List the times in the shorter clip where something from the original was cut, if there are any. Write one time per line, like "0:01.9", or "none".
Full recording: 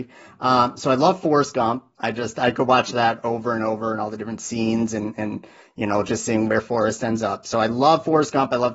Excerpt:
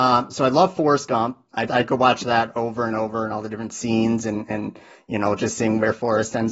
0:01.7